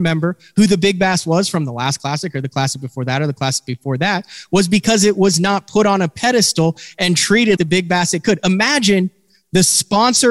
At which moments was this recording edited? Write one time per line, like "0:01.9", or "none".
0:07.6